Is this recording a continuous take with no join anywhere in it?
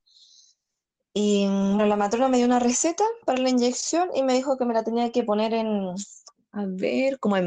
no; 1 cut; at 1.8 s

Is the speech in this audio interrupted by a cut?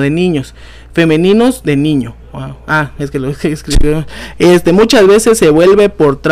no; 0 cuts

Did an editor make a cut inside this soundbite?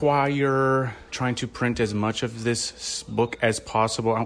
yes; 1 cut; at 1.1 s

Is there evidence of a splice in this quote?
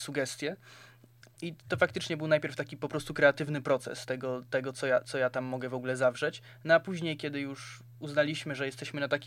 no; 0 cuts

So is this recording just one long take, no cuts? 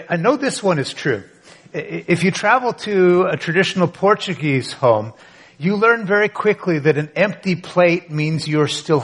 yes; 0 cuts

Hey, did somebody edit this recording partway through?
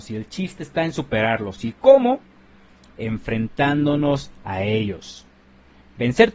no; 0 cuts

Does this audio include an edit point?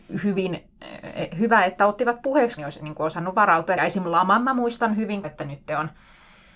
yes; 3 cuts; at 2.6 s, 3.8 s, 5.2 s

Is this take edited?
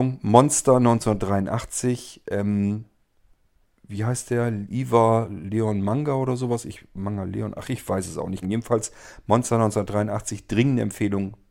yes; 1 cut; at 8.4 s

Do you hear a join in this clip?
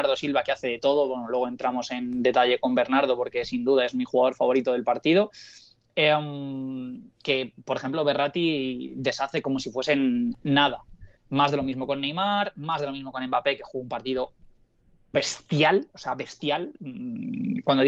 no; 0 cuts

